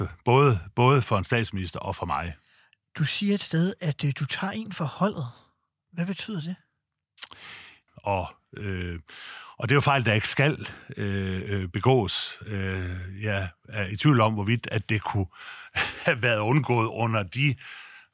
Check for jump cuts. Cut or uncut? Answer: cut